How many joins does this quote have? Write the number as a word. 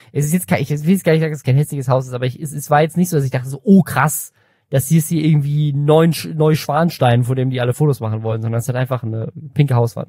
zero